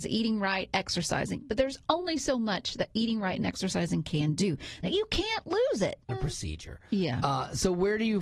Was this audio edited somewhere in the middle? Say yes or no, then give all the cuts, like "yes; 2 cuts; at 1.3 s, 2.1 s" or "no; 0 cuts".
yes; 2 cuts; at 4.8 s, 6.1 s